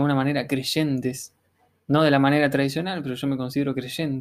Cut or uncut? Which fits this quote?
uncut